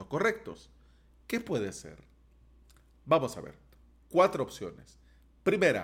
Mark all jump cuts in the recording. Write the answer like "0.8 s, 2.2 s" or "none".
none